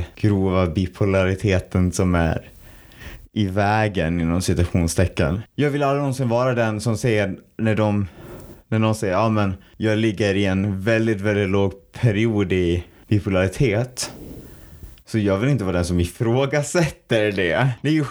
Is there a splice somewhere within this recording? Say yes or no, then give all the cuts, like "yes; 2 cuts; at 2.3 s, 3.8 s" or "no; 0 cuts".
yes; 1 cut; at 5.5 s